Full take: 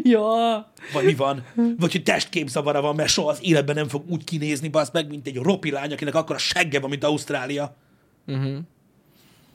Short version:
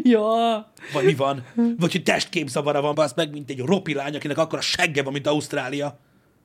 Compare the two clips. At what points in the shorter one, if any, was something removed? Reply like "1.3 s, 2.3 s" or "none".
2.9 s

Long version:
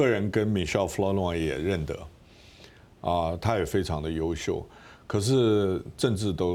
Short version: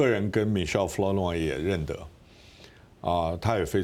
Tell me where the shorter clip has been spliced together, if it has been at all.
none

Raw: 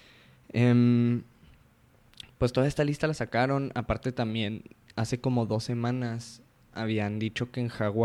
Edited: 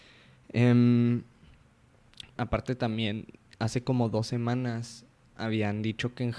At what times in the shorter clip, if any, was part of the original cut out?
2.4 s

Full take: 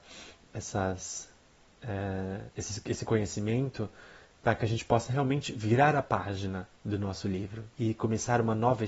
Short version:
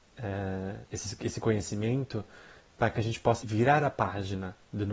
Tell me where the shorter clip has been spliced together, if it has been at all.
3.4 s

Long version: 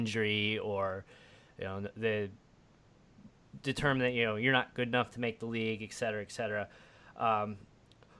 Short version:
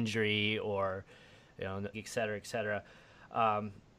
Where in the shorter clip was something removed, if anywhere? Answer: 1.9 s

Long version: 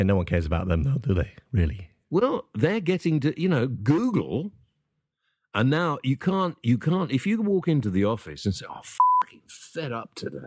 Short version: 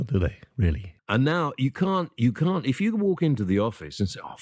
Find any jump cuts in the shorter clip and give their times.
1.0 s

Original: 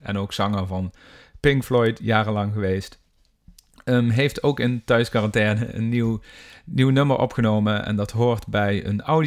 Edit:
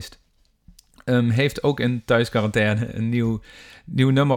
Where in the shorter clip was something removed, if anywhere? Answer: none

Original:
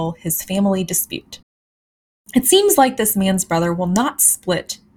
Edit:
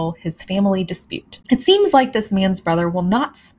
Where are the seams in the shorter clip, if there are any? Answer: 1.4 s

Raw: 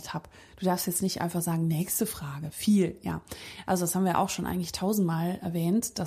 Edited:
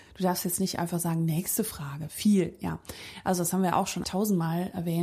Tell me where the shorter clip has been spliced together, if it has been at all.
4.0 s

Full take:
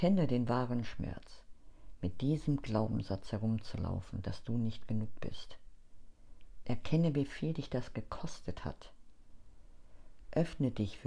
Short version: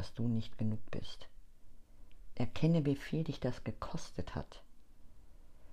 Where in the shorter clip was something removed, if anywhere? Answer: none

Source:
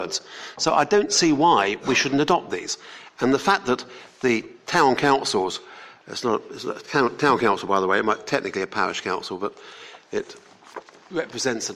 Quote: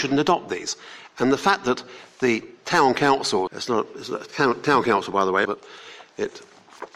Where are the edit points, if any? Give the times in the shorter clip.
3.5 s, 5.4 s

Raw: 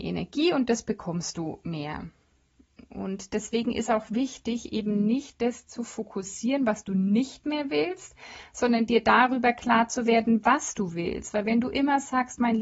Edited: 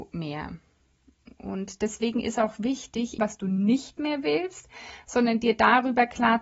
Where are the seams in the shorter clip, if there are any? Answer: 3.2 s

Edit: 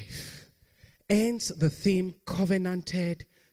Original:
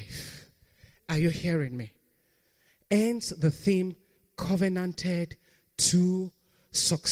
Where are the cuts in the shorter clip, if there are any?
1.0 s, 2.2 s

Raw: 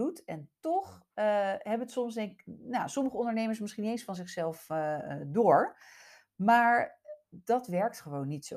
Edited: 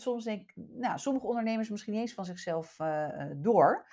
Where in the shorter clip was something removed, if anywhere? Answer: none

